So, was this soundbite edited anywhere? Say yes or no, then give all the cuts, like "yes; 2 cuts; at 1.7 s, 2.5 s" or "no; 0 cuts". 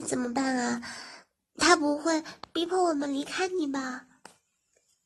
no; 0 cuts